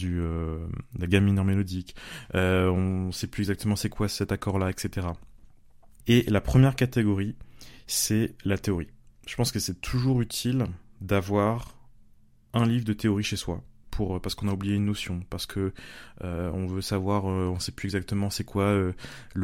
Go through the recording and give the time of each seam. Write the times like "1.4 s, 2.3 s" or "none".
6.0 s, 13.8 s